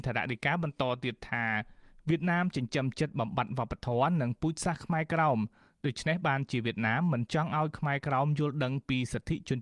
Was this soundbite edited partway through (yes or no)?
no